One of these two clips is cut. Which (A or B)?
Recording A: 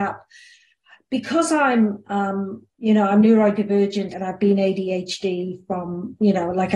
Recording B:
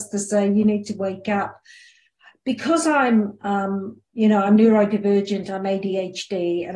A